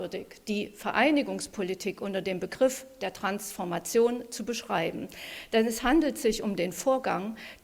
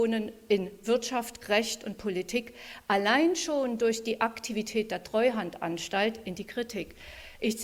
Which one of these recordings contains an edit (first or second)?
second